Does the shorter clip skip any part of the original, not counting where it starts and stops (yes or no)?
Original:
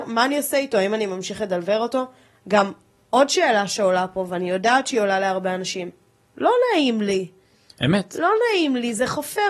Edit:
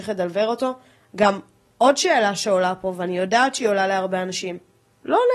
no